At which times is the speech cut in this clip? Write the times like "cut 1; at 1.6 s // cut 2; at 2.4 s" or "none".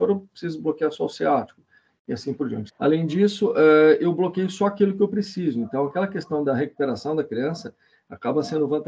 cut 1; at 2.7 s

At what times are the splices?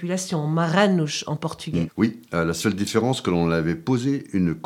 cut 1; at 1.9 s

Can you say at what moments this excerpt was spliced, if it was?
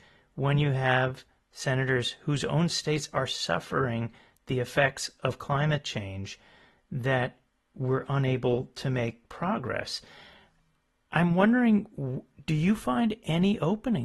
none

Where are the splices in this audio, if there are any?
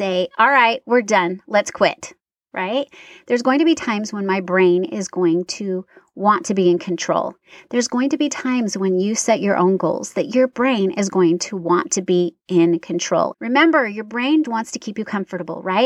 cut 1; at 13.3 s // cut 2; at 14.4 s

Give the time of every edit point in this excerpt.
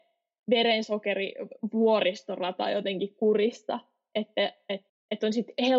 cut 1; at 4.9 s

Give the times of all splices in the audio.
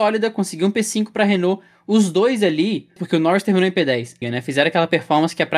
cut 1; at 3.0 s // cut 2; at 4.2 s

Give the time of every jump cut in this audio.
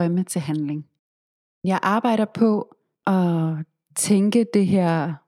none

